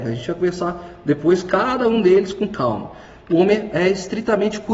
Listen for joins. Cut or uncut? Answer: uncut